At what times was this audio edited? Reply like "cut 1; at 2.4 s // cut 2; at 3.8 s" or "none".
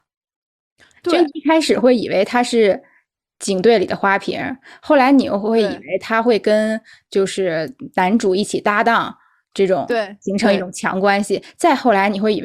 none